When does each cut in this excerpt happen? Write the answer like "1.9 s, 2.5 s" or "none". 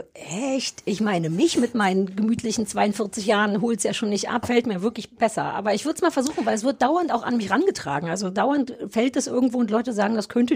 4.4 s